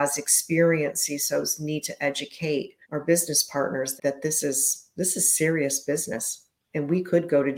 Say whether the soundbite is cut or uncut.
cut